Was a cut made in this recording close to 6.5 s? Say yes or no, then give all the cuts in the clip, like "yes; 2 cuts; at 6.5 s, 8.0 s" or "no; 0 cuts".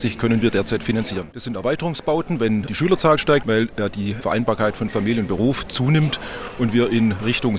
no; 2 cuts; at 1.3 s, 3.4 s